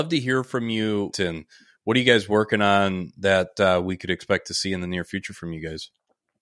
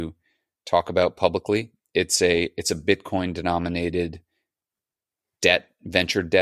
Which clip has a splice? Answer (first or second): first